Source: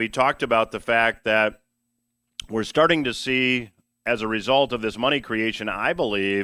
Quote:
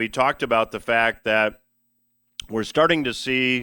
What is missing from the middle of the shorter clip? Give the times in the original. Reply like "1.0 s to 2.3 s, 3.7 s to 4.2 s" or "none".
none